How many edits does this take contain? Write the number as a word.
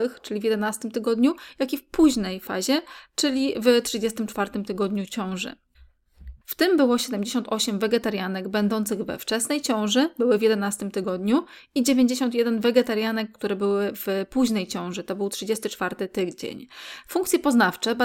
one